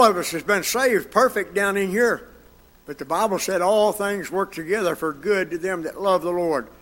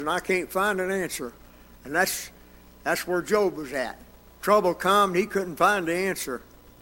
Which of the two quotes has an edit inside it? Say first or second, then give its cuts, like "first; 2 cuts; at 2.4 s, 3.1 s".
first; 1 cut; at 2.7 s